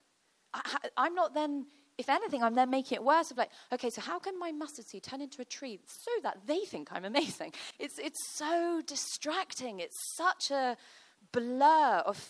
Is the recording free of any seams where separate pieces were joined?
yes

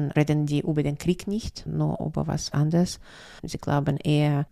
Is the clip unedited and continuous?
no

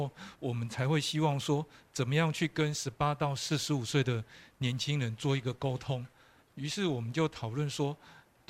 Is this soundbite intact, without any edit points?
no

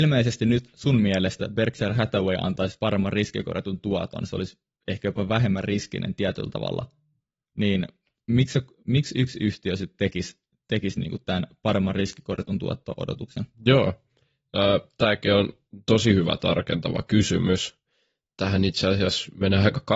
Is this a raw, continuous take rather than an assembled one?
yes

